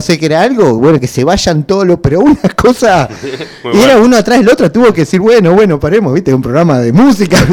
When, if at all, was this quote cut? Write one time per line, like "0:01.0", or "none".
none